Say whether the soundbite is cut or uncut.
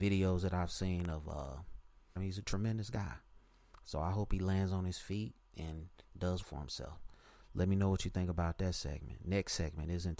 cut